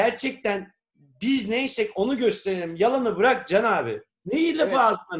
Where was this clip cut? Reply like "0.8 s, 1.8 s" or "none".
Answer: none